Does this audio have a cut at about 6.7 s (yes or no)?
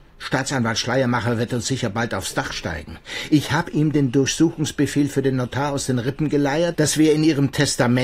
yes